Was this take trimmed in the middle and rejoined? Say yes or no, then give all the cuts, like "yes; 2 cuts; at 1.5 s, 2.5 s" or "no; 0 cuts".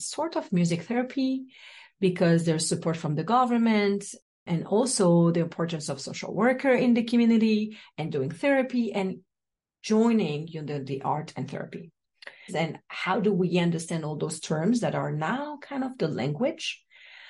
yes; 1 cut; at 12.5 s